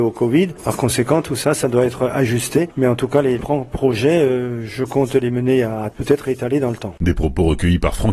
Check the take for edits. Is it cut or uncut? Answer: cut